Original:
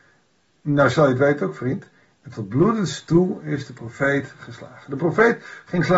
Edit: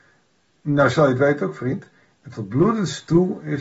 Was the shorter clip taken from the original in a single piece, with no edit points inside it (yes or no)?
yes